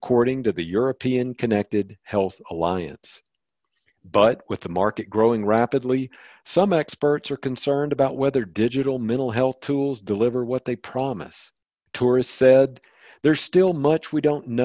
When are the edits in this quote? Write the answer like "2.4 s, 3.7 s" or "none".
none